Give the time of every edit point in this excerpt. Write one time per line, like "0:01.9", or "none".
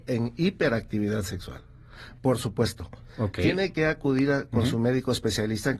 0:02.2